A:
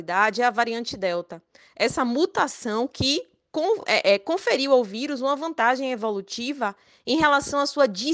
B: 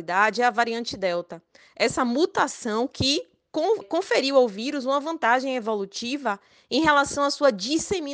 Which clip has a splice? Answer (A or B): B